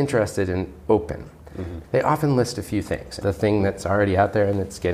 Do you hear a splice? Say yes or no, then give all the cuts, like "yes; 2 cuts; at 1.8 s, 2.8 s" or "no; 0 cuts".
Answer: yes; 2 cuts; at 1.8 s, 3.2 s